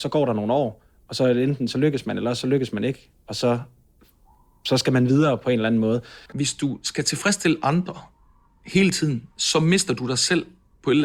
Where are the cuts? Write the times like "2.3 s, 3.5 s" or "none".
6.3 s, 9.3 s

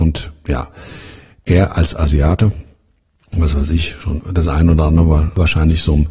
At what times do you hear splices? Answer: none

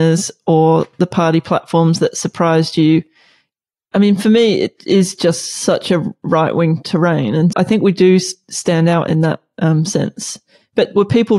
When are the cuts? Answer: 7.5 s

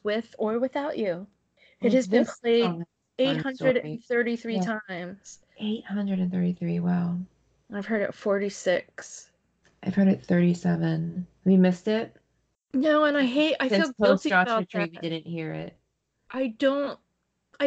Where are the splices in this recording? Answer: none

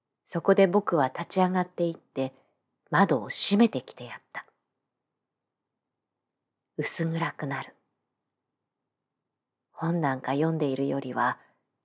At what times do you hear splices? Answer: none

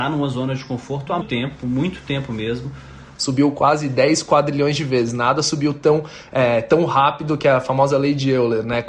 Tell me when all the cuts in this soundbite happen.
1.2 s, 3.2 s

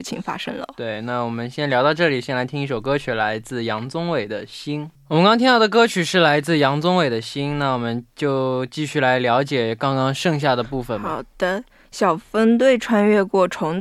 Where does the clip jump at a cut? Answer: 5.0 s

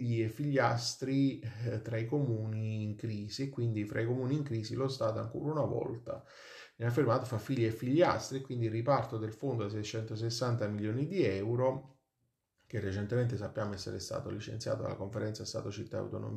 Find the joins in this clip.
none

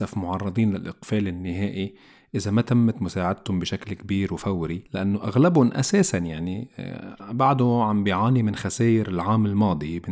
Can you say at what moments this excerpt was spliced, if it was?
4.9 s

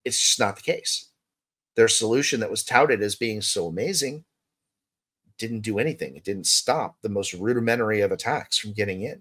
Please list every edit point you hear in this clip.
none

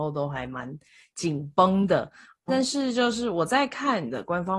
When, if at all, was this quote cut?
2.5 s

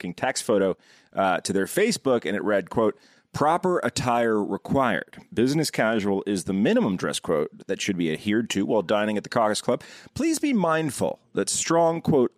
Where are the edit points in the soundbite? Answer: none

